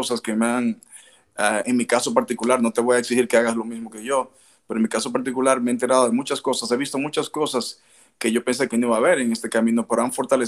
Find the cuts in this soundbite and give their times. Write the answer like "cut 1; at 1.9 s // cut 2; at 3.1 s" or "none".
cut 1; at 1.6 s